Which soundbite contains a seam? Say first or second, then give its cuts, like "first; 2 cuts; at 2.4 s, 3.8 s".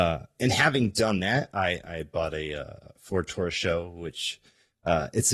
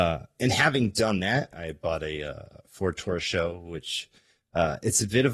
second; 1 cut; at 1.5 s